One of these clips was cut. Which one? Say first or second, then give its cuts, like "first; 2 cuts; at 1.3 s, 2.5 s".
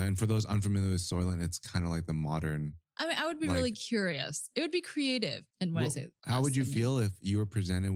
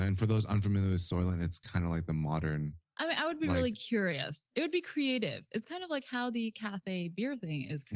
first; 1 cut; at 5.5 s